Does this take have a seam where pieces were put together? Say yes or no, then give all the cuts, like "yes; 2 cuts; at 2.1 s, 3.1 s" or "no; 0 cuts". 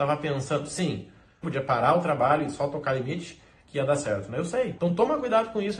yes; 2 cuts; at 1.4 s, 4.8 s